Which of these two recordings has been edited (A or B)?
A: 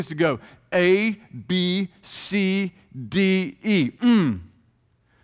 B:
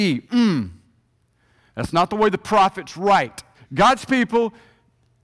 B